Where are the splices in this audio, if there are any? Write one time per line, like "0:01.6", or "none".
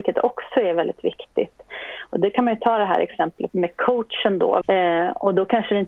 0:03.5
0:04.6